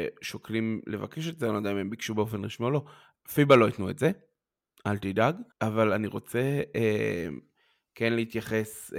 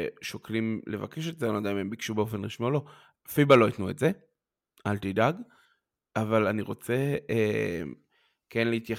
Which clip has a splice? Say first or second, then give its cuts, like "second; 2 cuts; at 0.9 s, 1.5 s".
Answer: first; 1 cut; at 5.5 s